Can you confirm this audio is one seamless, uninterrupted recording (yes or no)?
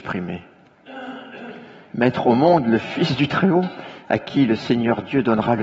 no